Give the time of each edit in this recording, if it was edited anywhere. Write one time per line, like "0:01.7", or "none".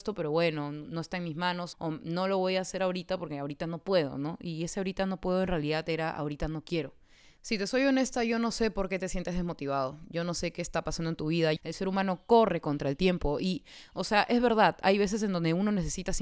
0:01.7
0:07.4
0:11.6